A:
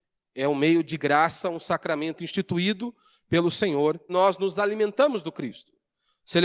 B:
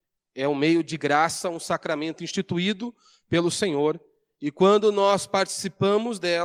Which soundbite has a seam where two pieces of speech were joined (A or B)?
A